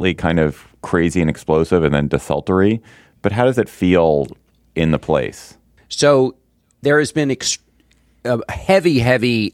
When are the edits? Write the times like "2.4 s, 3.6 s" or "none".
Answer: 5.8 s